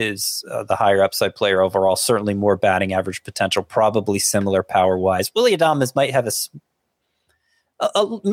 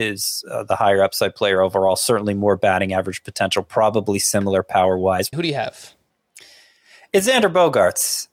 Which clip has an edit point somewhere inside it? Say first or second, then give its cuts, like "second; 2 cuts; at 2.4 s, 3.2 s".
second; 1 cut; at 5.3 s